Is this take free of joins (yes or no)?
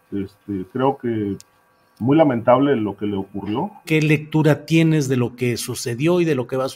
no